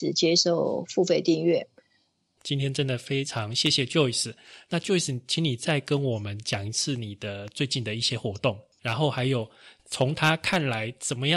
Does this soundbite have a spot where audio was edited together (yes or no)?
yes